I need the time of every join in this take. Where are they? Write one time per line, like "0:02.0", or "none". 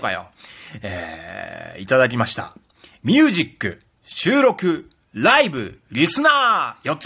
none